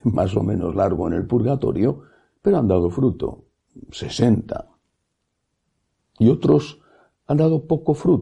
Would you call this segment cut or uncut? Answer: uncut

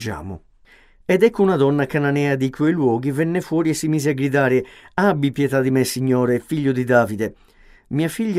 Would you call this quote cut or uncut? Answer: uncut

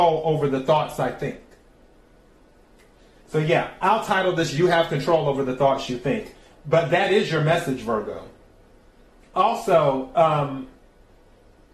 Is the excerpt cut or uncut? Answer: cut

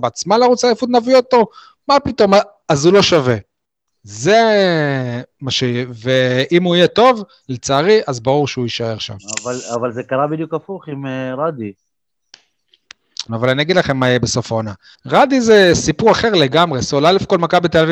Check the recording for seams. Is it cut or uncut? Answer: cut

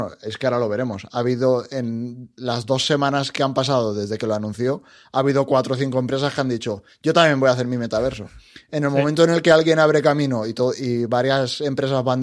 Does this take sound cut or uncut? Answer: cut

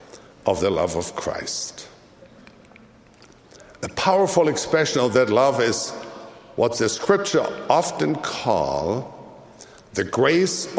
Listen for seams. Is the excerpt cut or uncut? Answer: uncut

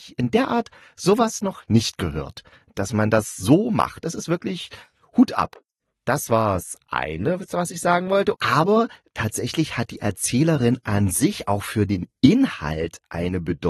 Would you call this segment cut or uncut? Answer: cut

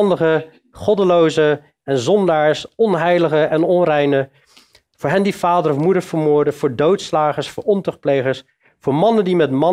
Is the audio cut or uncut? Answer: uncut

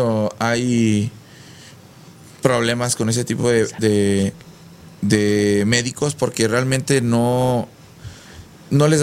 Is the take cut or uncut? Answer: uncut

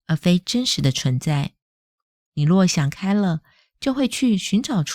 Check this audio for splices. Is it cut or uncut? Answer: uncut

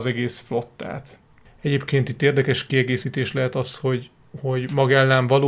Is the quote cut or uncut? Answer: uncut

